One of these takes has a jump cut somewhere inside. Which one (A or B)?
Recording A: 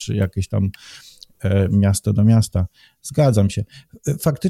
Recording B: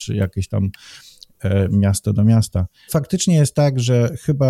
B